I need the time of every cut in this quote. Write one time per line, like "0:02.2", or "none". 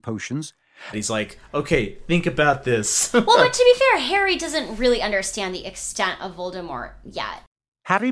0:00.9